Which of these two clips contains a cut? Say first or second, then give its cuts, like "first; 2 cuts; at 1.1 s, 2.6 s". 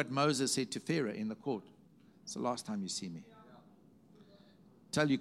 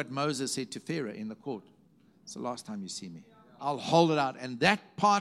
second; 1 cut; at 3.6 s